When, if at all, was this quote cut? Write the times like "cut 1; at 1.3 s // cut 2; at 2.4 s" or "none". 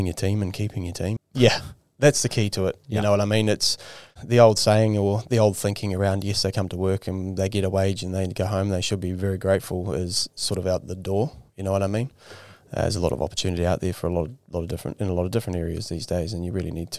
cut 1; at 1.2 s